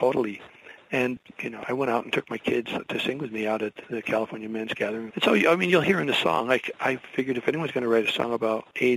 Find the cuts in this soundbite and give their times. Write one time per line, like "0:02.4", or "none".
0:05.1